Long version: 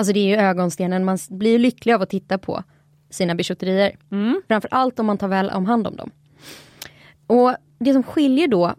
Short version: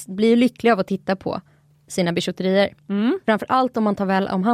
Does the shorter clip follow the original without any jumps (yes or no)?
yes